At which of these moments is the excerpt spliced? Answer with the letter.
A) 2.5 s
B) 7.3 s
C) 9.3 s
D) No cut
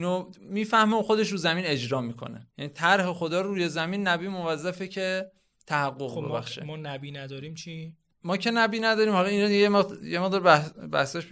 A